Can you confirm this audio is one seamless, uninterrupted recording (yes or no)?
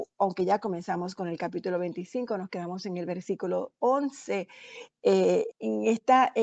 no